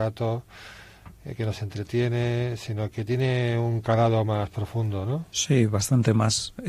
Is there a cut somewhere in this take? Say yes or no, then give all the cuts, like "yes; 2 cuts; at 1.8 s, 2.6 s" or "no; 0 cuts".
yes; 1 cut; at 2.9 s